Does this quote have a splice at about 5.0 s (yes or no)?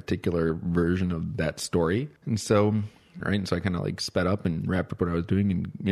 no